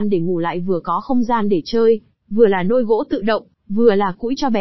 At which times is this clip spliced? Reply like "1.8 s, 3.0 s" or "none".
2.2 s, 3.5 s